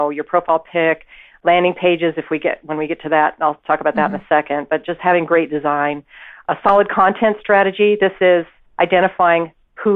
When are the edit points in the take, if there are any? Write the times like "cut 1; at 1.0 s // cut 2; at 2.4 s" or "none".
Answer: none